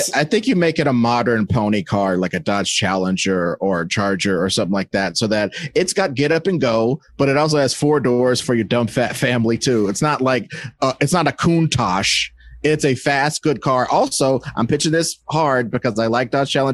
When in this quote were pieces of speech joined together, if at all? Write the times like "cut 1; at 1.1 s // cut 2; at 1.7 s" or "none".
none